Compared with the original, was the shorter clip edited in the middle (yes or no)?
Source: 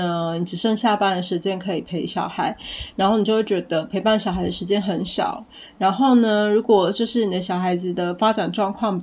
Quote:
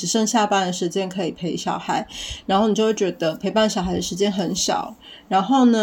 no